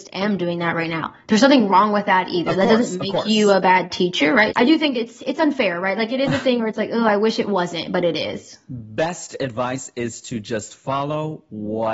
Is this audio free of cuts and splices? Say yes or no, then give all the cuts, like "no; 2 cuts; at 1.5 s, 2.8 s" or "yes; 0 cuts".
no; 1 cut; at 4.5 s